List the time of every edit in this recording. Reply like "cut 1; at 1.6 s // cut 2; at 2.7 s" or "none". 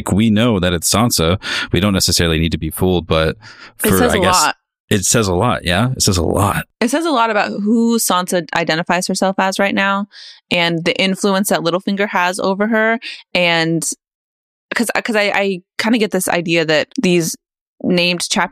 cut 1; at 16.9 s

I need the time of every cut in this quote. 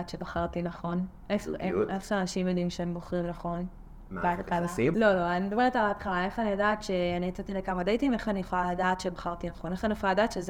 cut 1; at 4.9 s

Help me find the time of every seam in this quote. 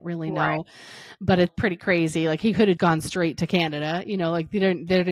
cut 1; at 1.5 s // cut 2; at 2.8 s

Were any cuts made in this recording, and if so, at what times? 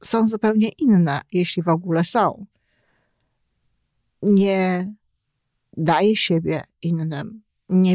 none

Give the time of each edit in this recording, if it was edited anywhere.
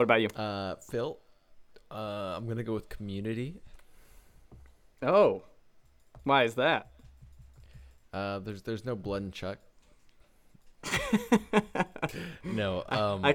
none

